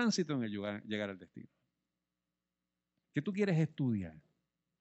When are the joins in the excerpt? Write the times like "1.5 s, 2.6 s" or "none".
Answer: 3.0 s

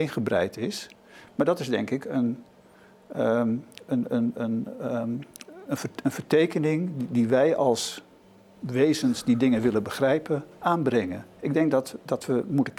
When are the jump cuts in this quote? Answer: 4.3 s

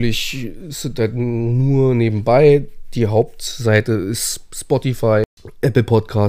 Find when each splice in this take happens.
none

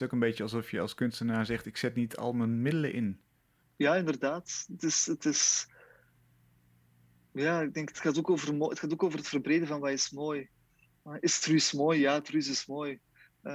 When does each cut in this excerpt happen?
none

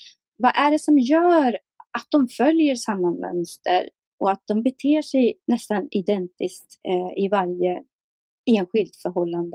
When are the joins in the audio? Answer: 6.8 s

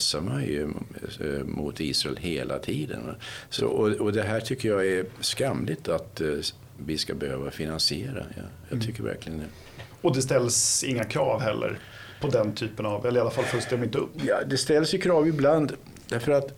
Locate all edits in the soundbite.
none

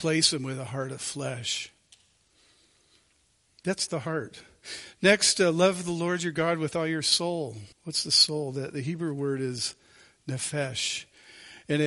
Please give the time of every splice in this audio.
7.7 s

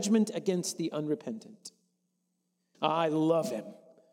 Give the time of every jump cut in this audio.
2.7 s

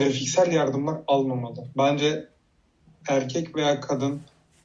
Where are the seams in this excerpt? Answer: 1.7 s

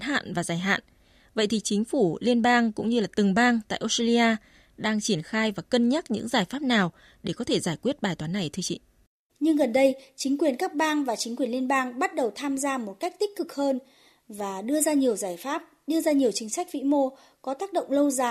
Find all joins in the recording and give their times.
9.3 s

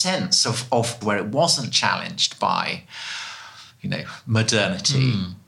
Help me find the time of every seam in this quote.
1.0 s

